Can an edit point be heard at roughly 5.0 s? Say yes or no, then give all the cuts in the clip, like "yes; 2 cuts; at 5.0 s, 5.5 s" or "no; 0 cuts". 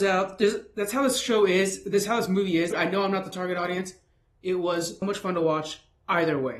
yes; 2 cuts; at 2.7 s, 5.0 s